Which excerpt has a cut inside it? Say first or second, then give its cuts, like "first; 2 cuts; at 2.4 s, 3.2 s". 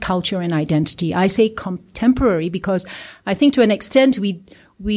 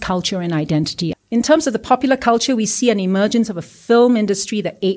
second; 1 cut; at 1.1 s